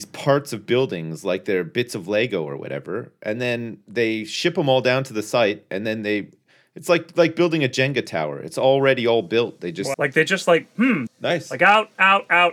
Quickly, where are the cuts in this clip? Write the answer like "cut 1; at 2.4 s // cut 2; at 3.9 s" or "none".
cut 1; at 9.9 s // cut 2; at 11.1 s